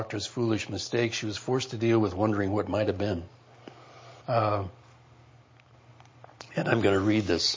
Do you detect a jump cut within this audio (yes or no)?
yes